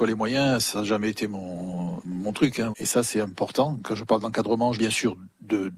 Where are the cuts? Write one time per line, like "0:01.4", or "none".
0:02.7
0:04.7